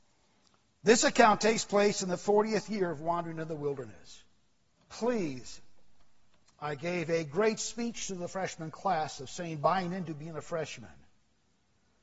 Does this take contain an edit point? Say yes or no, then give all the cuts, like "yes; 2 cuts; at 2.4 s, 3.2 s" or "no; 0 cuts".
yes; 1 cut; at 4.7 s